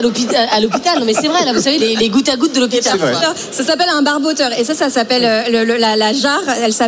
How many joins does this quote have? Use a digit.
1